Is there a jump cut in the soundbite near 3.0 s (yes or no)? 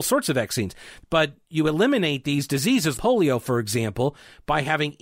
yes